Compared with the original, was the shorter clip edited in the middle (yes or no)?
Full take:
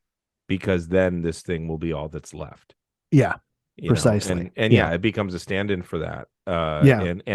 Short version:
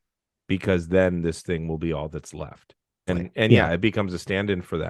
yes